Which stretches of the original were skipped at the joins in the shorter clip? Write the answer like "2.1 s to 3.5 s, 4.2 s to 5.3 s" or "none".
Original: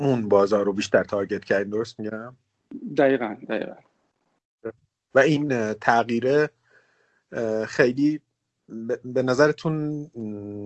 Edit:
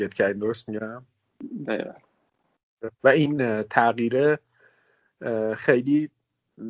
3.0 s to 3.5 s, 4.8 s to 5.0 s